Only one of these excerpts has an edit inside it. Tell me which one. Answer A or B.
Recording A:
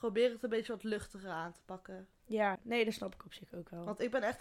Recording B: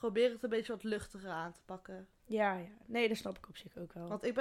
A